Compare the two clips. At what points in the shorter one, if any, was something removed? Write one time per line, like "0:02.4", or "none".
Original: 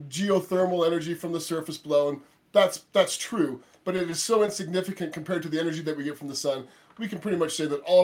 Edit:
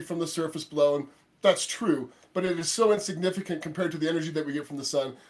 0:01.4